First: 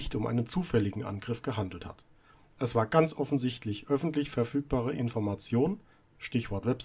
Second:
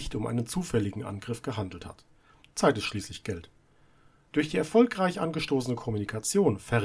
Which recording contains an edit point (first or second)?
second